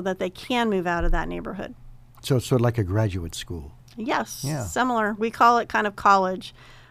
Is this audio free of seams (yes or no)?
yes